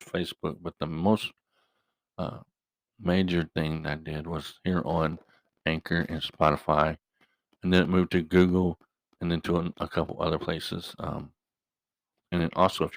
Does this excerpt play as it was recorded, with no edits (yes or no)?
yes